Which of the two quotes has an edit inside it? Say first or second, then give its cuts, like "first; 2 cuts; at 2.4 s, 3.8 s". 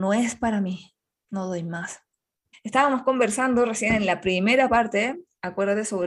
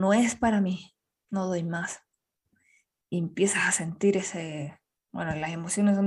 first; 1 cut; at 2.5 s